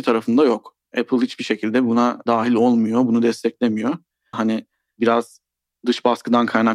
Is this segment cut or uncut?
cut